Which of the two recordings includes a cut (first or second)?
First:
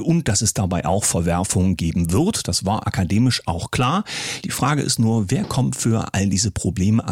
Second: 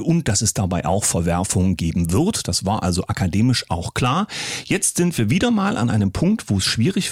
first